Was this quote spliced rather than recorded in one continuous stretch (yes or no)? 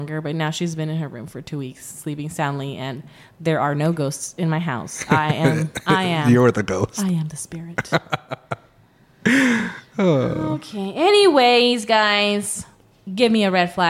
no